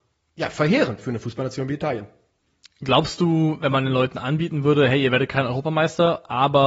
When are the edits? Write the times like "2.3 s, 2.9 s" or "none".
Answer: none